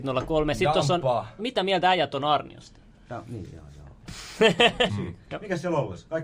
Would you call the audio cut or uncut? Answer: cut